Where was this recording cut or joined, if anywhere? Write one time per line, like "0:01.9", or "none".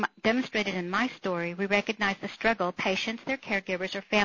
none